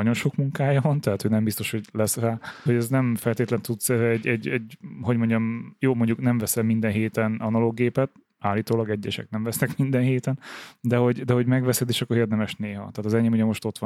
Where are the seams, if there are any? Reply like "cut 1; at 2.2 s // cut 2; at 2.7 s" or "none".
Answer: cut 1; at 2.7 s